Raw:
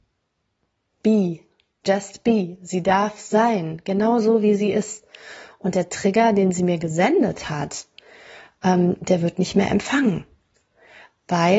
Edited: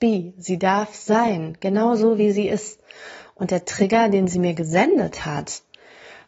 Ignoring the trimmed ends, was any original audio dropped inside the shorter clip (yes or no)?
no